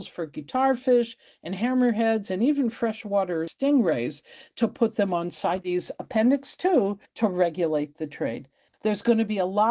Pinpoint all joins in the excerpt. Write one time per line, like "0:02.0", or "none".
0:08.7